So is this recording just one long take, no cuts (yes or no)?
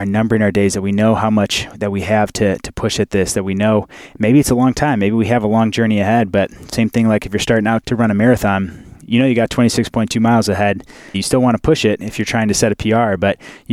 no